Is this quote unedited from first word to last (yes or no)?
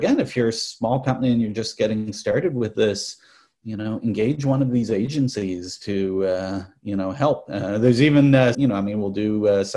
no